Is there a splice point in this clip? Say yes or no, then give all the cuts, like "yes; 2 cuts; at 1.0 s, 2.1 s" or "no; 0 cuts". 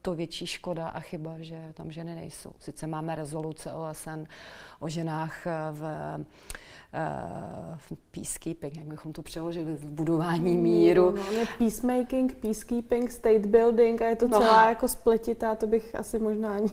no; 0 cuts